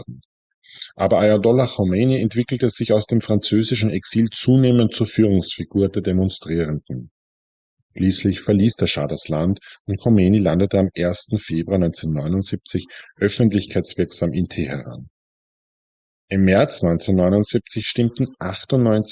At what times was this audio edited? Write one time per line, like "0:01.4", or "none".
none